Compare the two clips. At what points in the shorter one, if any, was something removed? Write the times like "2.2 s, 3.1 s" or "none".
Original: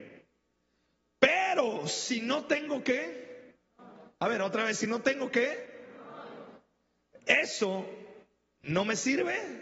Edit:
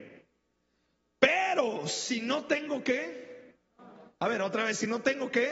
none

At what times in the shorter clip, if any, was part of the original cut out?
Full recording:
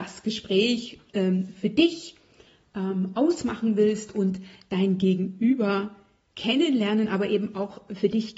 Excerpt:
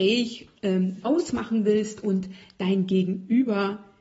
1.0 s

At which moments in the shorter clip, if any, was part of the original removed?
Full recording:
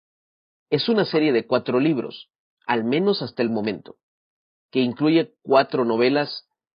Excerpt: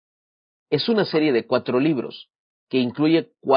2.5 s

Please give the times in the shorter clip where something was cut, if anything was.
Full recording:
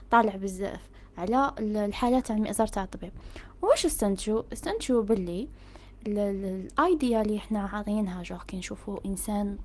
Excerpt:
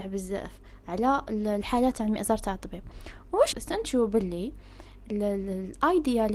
3.5 s

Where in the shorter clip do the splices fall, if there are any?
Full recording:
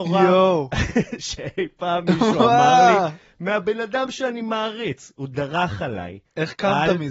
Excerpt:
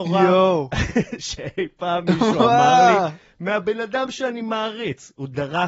none

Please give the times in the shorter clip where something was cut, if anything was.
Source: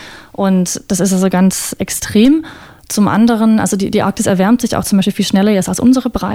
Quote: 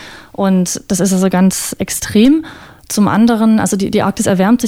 none

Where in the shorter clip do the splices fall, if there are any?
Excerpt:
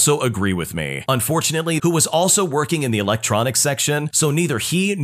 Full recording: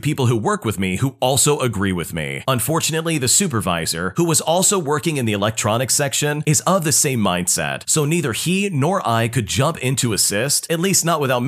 1.8 s, 4.1 s

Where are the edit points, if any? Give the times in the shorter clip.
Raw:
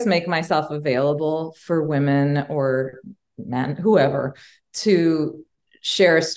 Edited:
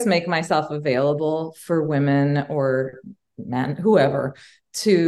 none

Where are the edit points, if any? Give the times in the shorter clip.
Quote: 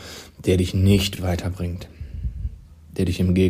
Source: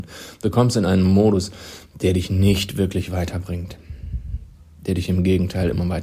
1.2 s

